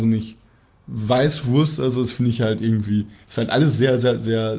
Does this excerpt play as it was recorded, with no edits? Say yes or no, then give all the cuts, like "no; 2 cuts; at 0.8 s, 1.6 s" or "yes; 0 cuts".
yes; 0 cuts